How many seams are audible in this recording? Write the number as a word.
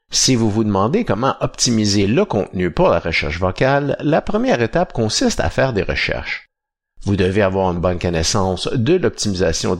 zero